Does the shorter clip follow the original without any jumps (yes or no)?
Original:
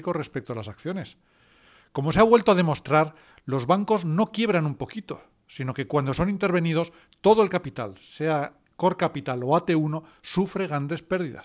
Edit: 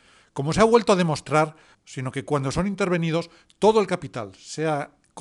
no